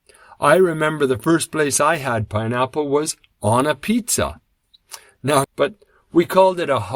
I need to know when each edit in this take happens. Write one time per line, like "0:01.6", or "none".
0:05.4